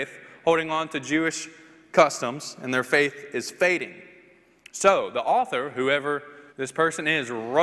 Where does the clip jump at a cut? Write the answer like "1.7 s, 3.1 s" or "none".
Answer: 6.5 s